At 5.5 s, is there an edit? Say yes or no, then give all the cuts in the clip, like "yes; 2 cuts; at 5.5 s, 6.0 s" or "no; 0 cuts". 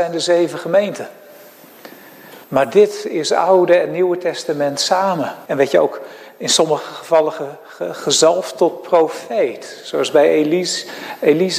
yes; 2 cuts; at 2.4 s, 5.5 s